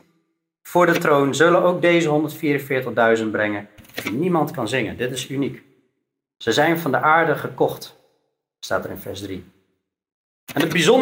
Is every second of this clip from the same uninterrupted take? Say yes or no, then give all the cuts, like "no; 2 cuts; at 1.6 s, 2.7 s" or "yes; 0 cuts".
yes; 0 cuts